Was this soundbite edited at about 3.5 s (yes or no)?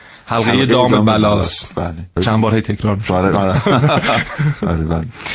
no